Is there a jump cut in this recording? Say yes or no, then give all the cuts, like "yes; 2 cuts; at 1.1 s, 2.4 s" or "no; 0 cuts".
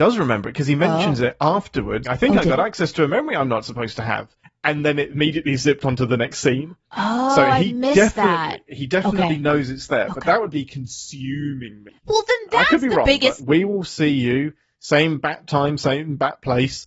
yes; 2 cuts; at 2.0 s, 13.4 s